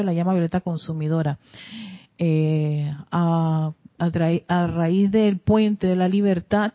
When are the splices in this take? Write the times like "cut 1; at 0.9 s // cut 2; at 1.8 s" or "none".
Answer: none